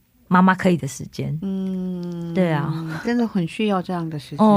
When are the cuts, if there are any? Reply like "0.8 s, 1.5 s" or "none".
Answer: none